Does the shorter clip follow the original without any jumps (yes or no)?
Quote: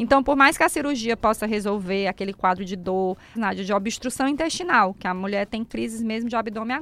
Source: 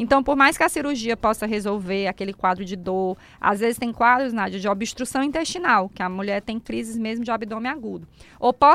no